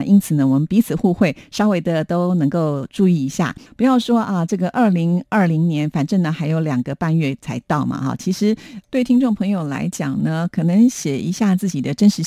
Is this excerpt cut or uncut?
cut